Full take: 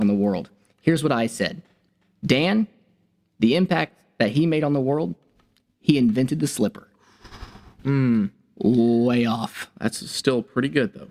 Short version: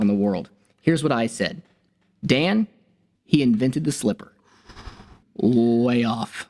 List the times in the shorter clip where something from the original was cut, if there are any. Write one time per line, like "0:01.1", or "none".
0:03.2
0:05.2